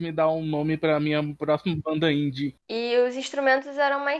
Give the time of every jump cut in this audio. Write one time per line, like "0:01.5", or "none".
0:02.6